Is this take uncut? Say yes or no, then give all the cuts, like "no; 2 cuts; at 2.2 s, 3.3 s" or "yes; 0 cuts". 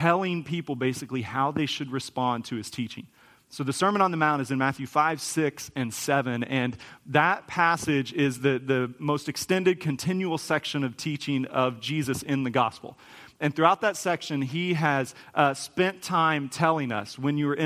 yes; 0 cuts